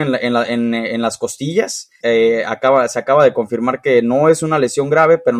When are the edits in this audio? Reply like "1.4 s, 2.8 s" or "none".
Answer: 2.0 s